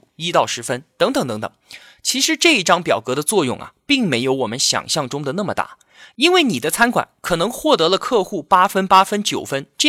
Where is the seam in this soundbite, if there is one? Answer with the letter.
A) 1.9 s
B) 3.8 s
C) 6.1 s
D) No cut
D